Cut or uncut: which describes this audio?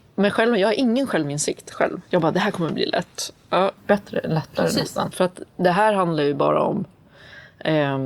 cut